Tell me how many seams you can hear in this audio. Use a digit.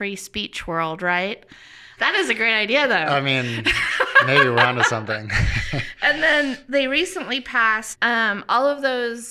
2